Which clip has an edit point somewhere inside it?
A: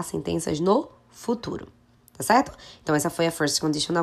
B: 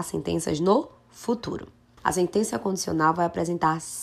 B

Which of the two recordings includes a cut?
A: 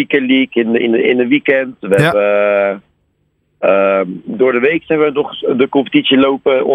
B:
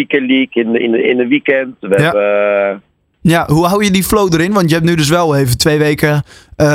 B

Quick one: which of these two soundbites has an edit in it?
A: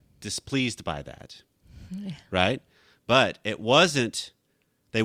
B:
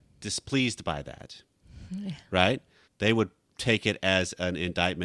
B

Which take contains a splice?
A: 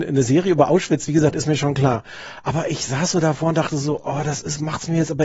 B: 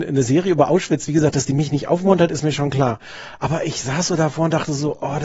A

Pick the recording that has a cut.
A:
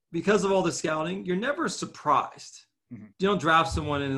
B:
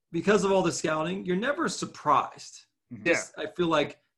B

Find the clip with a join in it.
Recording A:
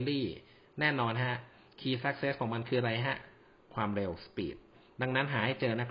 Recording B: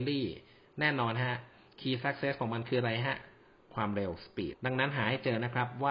B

